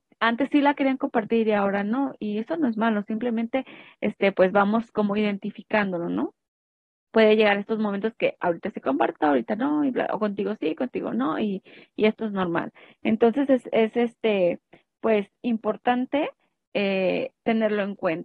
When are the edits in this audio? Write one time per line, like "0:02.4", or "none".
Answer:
none